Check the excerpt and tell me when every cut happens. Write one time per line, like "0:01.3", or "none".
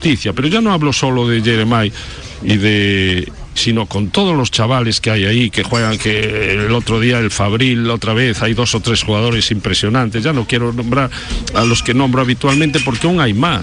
0:03.6